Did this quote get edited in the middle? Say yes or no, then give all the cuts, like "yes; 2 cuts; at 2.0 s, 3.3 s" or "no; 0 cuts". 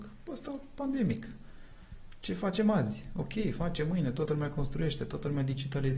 no; 0 cuts